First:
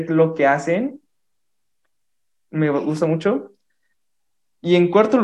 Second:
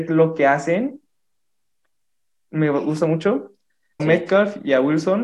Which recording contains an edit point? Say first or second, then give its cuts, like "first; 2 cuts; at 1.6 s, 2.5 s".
second; 1 cut; at 4.0 s